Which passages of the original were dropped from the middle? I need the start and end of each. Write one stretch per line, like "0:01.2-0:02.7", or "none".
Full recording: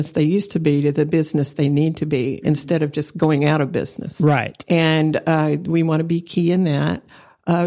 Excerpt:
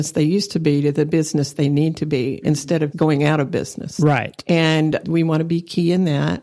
0:02.9-0:03.1
0:05.2-0:05.6